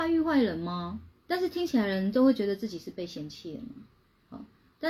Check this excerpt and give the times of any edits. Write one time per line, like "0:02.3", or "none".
0:01.1